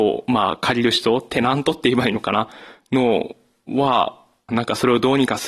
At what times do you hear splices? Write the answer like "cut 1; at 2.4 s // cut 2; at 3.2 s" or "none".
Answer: cut 1; at 4.5 s